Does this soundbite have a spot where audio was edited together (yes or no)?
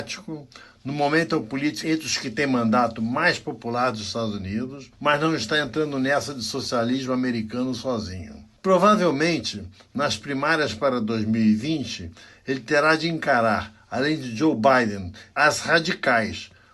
yes